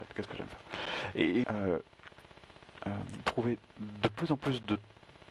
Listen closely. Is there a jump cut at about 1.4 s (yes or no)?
yes